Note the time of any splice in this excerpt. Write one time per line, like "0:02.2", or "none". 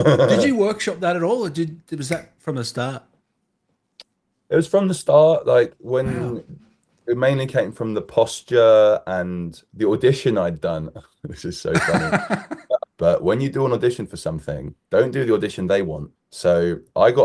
0:12.9
0:16.2